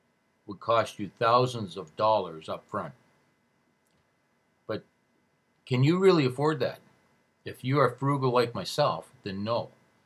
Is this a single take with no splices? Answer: yes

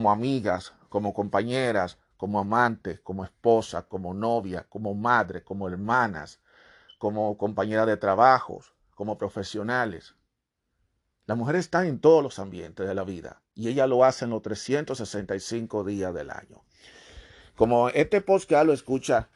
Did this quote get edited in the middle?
no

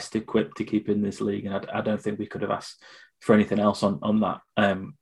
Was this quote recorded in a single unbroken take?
yes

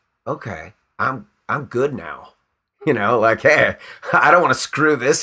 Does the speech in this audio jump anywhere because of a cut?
no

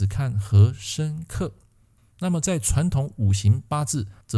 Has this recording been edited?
no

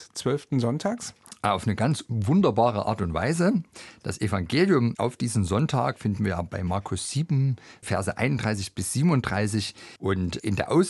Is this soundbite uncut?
no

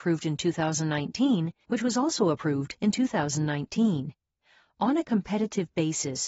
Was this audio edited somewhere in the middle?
yes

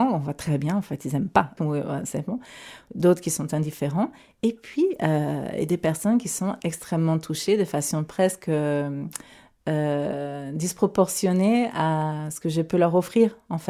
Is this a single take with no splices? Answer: no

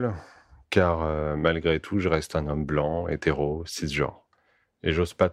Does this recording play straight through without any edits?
yes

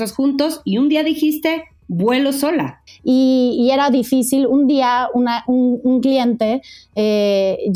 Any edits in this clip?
yes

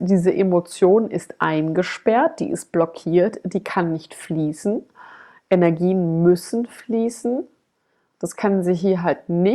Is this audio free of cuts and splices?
yes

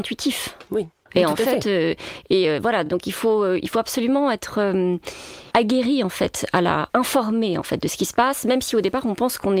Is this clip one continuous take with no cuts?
yes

